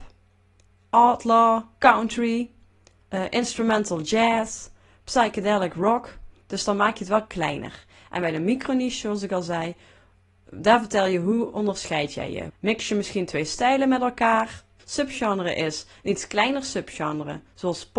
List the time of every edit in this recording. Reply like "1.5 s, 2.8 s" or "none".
12.5 s, 14.8 s